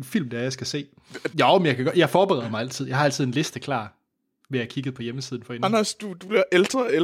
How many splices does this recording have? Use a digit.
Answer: 1